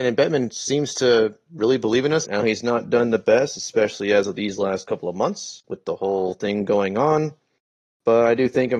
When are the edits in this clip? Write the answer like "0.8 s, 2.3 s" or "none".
2.2 s